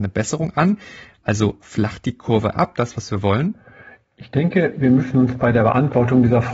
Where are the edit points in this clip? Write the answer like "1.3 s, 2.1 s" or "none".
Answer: none